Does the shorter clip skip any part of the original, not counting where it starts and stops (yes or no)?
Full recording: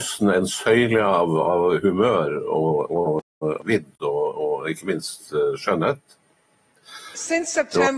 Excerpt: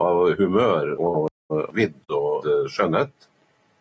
yes